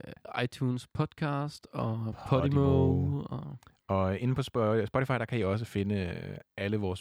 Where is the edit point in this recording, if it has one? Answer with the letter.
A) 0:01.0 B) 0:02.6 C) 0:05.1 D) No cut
D